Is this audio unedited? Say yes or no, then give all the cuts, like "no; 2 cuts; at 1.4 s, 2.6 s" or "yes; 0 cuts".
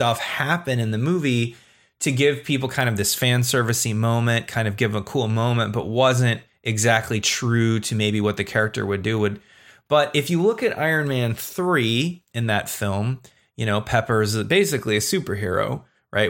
yes; 0 cuts